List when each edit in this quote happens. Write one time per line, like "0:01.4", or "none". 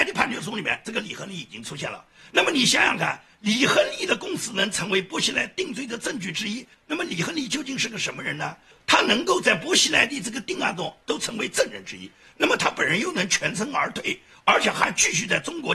none